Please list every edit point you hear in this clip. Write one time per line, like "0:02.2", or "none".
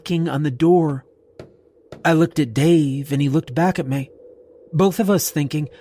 none